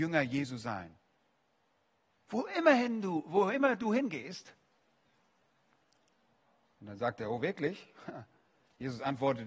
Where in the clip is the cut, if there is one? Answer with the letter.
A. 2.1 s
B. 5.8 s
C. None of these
A